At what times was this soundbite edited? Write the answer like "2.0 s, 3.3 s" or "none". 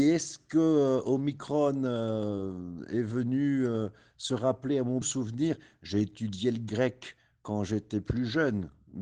5.0 s